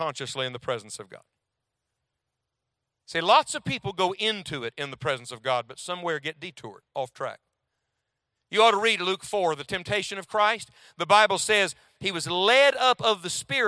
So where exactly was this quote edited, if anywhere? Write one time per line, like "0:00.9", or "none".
none